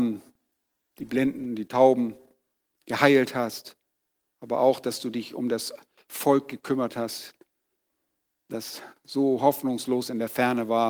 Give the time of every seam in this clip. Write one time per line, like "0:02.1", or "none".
none